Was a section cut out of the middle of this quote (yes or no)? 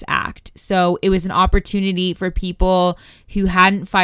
no